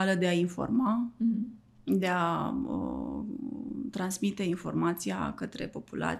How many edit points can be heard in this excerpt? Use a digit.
0